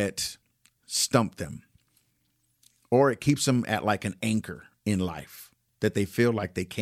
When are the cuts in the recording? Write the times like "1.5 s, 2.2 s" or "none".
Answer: none